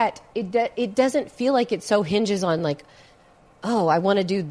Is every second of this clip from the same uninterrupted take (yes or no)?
yes